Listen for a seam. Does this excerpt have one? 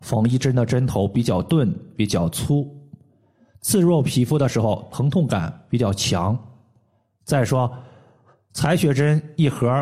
no; 0 cuts

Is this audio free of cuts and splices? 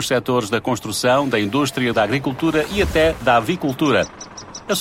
no; 1 cut; at 1.9 s

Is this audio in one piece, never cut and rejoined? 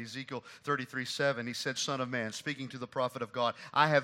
no; 1 cut; at 1.8 s

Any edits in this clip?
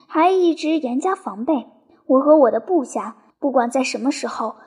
yes; 1 cut; at 3.3 s

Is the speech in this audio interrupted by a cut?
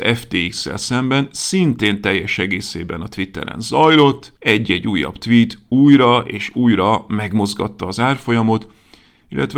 no; 0 cuts

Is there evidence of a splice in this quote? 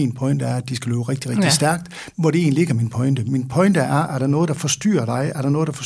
no; 0 cuts

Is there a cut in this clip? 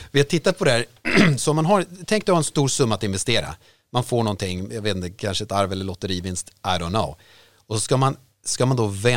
no; 0 cuts

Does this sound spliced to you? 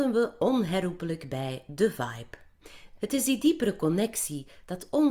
yes; 1 cut; at 3.0 s

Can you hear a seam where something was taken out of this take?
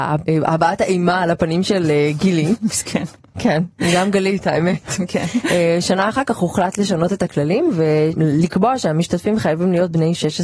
no; 0 cuts

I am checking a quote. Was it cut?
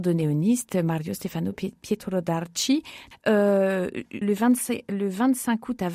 yes; 2 cuts; at 3.1 s, 4.2 s

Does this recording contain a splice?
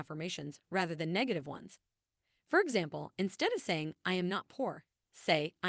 no; 0 cuts

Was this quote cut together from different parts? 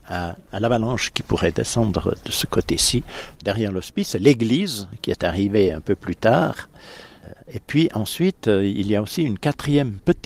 no; 0 cuts

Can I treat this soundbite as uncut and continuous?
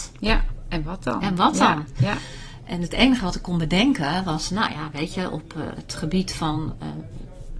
yes; 0 cuts

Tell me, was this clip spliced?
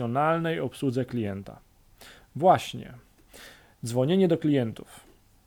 no; 0 cuts

